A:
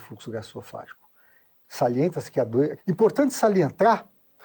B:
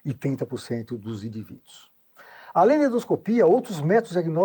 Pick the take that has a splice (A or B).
A